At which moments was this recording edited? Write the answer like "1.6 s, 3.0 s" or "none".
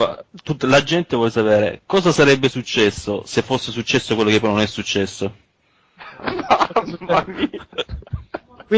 none